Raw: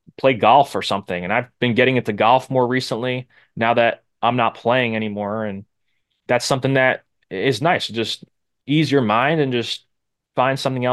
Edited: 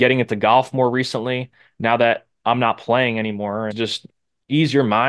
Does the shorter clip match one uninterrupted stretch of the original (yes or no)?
no